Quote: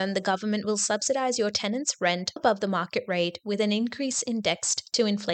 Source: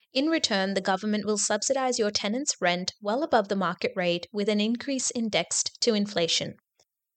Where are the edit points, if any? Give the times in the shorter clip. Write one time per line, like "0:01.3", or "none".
0:02.4